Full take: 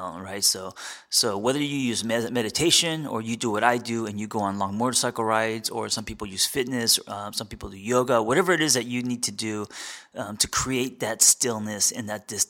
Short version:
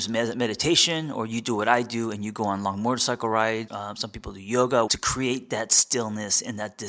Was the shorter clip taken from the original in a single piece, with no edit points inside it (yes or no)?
no